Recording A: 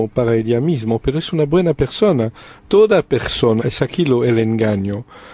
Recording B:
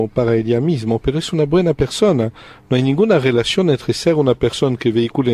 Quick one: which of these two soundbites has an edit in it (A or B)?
A